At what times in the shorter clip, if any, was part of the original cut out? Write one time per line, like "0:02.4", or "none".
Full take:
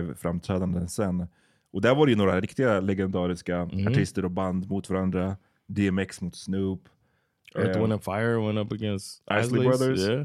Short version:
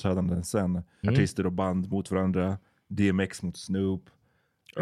0:01.0